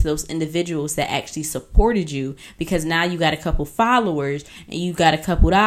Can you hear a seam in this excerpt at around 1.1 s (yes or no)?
no